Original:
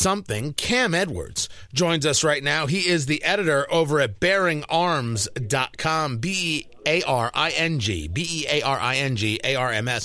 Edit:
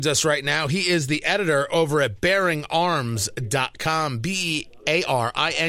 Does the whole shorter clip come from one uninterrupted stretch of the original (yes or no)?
yes